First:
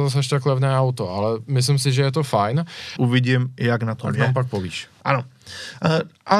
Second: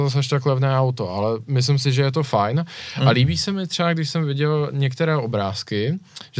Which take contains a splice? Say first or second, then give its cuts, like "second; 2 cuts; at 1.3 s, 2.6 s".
first; 1 cut; at 2.9 s